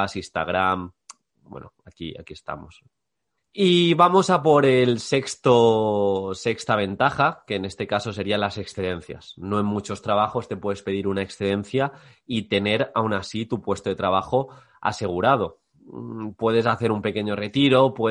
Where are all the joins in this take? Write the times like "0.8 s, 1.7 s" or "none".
3.4 s